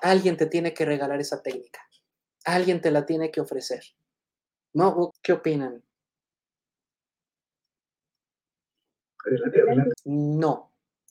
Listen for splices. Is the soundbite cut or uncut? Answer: cut